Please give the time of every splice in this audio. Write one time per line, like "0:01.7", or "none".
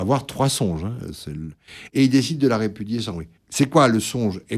0:01.9